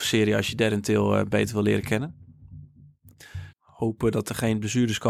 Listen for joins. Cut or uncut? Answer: cut